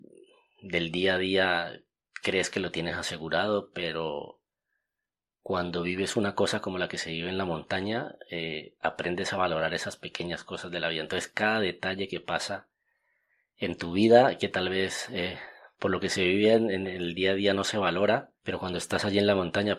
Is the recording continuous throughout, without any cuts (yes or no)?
no